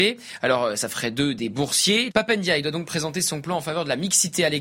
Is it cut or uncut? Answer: cut